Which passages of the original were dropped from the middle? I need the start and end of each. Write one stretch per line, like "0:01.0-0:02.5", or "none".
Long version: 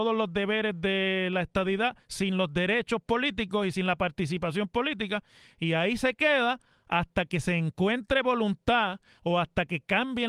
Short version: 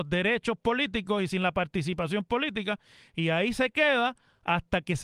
none